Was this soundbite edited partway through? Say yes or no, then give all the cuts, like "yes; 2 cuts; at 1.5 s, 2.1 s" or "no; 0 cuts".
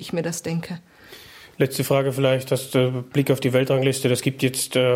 no; 0 cuts